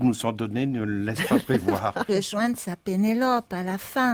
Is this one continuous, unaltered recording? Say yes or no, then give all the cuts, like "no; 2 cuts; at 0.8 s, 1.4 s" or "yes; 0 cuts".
no; 1 cut; at 2.1 s